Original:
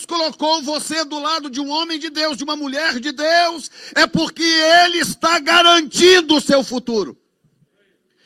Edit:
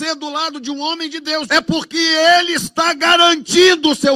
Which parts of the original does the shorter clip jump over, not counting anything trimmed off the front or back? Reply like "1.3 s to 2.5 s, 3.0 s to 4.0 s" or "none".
2.4 s to 3.9 s